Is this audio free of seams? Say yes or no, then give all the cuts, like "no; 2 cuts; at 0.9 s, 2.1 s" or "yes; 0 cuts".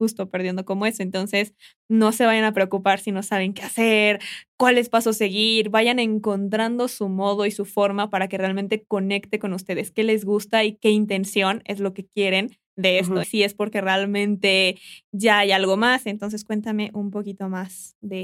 no; 1 cut; at 13.2 s